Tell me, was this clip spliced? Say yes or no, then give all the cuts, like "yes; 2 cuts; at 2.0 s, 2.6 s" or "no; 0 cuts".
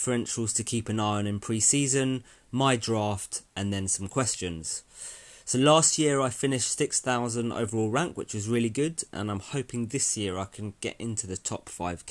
no; 0 cuts